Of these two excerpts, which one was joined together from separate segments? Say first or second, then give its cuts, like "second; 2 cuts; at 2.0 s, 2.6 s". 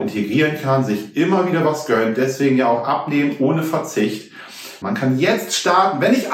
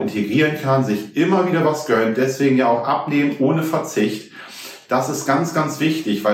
first; 1 cut; at 4.8 s